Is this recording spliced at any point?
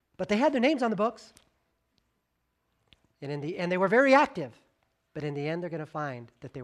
no; 0 cuts

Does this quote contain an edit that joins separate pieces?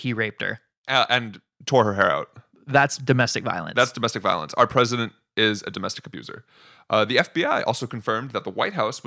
no; 0 cuts

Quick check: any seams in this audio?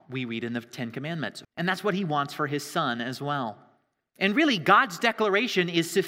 yes; 2 cuts; at 1.4 s, 4.1 s

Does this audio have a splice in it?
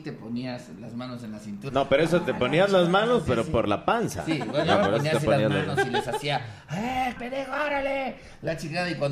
yes; 2 cuts; at 1.7 s, 7.2 s

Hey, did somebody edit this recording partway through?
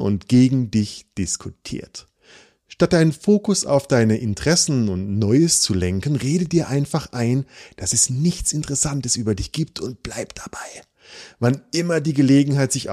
no; 0 cuts

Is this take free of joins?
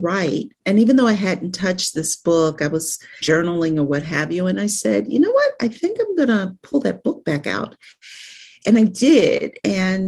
no; 1 cut; at 3.2 s

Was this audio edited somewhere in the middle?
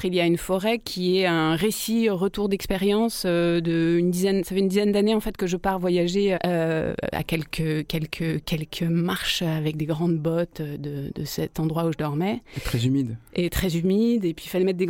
yes; 1 cut; at 6.4 s

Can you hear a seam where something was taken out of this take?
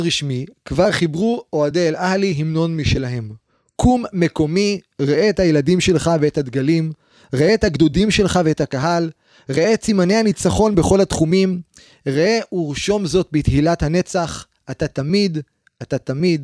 no; 0 cuts

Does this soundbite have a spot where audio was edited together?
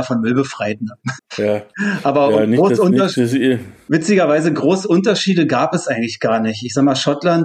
yes; 1 cut; at 1.2 s

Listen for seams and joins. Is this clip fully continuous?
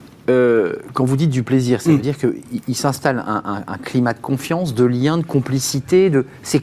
yes; 0 cuts

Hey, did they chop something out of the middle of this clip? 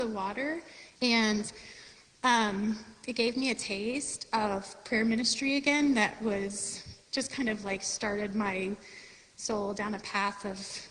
yes; 1 cut; at 1.0 s

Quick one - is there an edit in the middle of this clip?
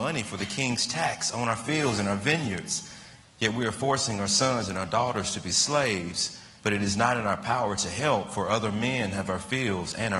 yes; 2 cuts; at 3.2 s, 6.6 s

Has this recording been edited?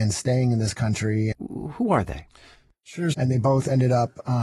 yes; 2 cuts; at 1.3 s, 3.1 s

